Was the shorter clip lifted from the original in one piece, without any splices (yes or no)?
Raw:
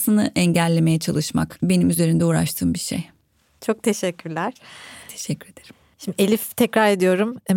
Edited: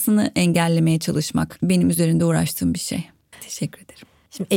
no